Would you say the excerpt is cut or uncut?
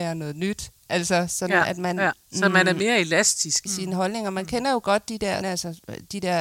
cut